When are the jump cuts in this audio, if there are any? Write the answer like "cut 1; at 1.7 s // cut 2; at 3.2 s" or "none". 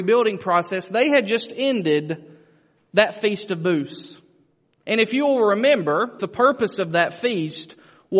cut 1; at 4.8 s // cut 2; at 6.2 s